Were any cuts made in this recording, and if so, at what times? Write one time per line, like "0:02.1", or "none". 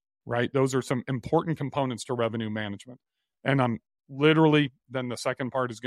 none